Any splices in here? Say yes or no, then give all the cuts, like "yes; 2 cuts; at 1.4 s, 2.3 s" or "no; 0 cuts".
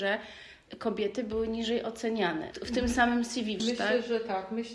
yes; 2 cuts; at 2.5 s, 3.6 s